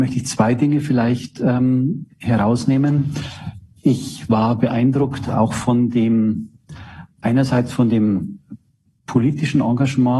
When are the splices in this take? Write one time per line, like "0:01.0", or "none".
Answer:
none